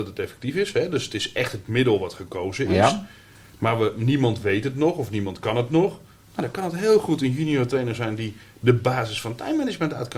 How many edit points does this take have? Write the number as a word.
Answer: zero